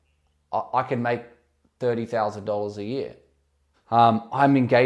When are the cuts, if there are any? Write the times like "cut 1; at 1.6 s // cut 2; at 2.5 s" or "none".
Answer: cut 1; at 3.7 s